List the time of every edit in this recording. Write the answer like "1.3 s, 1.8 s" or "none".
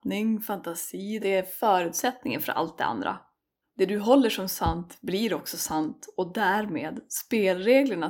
1.2 s, 3.6 s